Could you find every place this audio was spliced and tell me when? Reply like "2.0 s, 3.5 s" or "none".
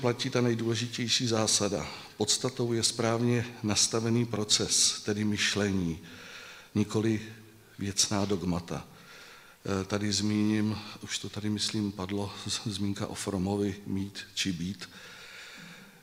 none